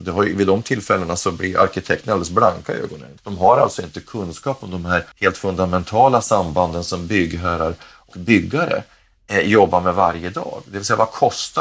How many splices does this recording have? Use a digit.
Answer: 3